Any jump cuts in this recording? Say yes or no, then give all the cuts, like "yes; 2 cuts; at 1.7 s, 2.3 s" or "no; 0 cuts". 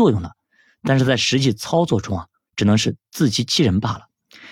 no; 0 cuts